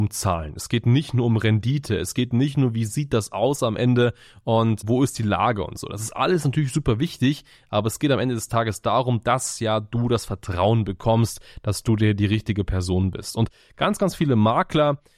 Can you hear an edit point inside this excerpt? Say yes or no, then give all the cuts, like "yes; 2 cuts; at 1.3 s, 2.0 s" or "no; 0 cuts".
no; 0 cuts